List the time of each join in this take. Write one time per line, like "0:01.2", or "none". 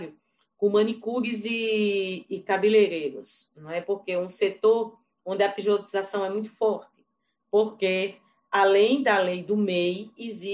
none